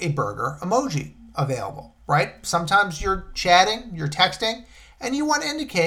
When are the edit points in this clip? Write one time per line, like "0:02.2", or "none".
none